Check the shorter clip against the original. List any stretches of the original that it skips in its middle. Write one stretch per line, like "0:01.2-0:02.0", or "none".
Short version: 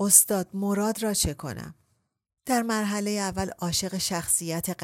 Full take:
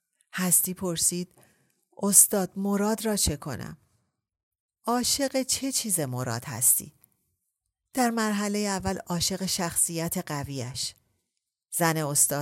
0:04.4-0:07.9